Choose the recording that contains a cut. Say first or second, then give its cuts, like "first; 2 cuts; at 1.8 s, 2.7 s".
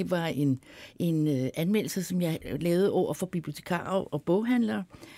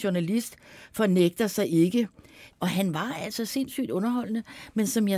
second; 1 cut; at 2.5 s